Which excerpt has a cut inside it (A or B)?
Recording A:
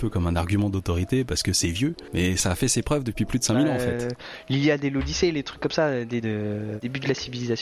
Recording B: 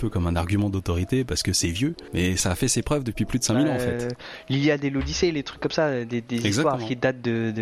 A